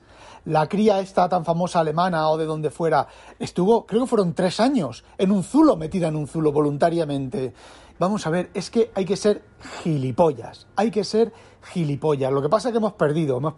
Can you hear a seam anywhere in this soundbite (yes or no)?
yes